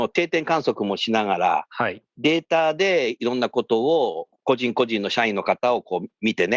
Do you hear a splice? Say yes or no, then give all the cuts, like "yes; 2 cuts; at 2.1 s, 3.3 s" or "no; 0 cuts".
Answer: no; 0 cuts